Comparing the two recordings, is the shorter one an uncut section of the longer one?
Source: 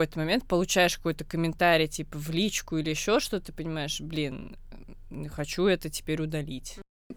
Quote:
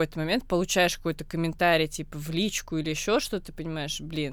yes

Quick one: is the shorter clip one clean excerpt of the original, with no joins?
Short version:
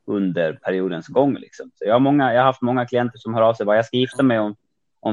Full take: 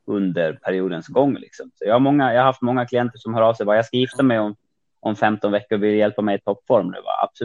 yes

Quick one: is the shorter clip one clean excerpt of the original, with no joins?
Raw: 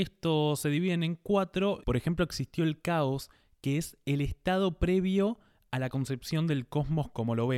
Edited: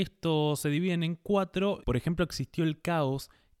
yes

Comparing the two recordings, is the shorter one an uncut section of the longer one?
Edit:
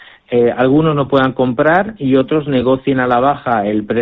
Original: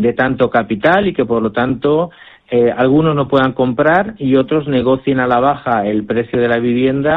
yes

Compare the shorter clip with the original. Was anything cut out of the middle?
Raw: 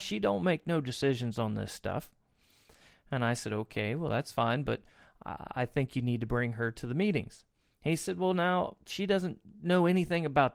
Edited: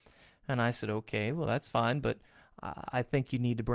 no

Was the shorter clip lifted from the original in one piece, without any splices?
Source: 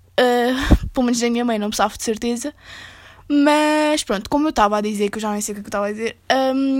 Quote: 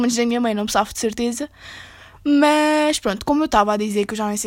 yes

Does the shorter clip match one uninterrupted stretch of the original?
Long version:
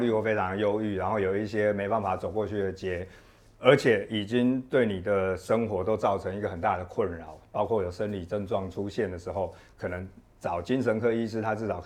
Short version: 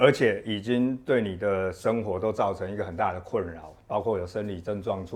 yes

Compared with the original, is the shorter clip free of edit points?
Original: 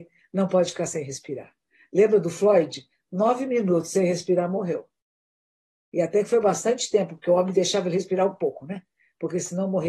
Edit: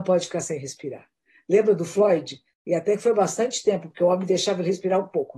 no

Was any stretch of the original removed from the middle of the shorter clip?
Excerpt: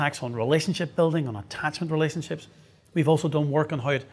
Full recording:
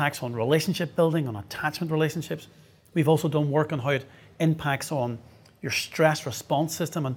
no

